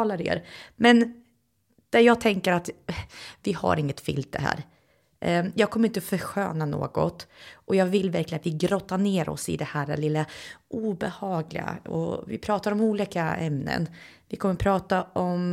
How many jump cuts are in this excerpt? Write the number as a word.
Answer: zero